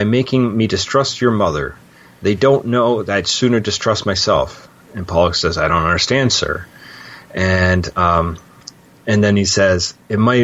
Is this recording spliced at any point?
no; 0 cuts

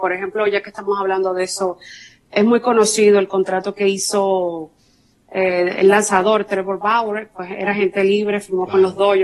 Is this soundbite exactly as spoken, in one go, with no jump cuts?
yes; 0 cuts

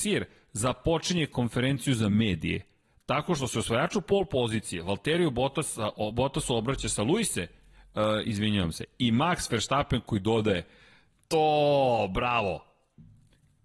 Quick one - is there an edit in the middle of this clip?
no; 0 cuts

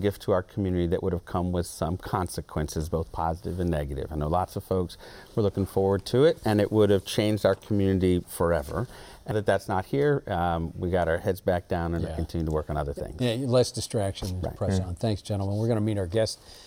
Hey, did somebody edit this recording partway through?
yes; 2 cuts; at 8.2 s, 9.3 s

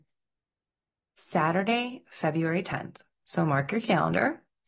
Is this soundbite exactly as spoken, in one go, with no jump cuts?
yes; 0 cuts

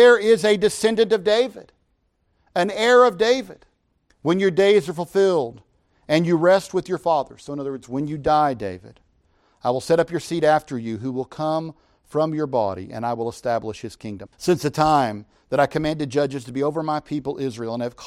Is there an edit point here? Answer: yes; 2 cuts; at 4.1 s, 14.3 s

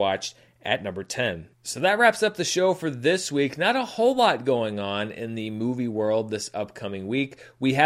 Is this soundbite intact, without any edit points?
yes; 0 cuts

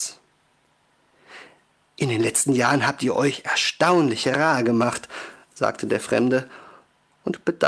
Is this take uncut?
yes; 0 cuts

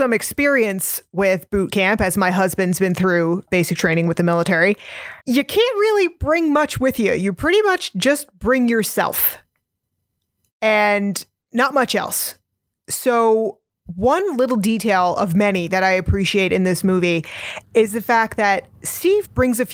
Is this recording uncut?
no; 1 cut; at 5.2 s

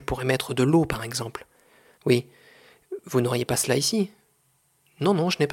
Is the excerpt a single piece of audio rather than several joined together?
no; 1 cut; at 1.9 s

